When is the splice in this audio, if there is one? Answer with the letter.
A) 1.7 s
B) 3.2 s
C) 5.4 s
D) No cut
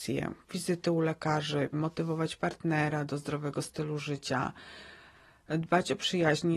A